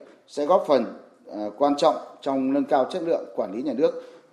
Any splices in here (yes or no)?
no